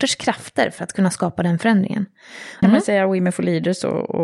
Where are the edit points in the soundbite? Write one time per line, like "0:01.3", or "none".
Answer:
0:02.6